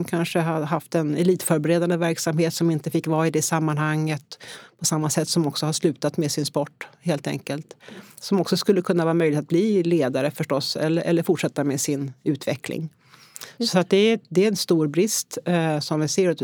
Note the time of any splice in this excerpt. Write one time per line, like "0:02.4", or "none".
none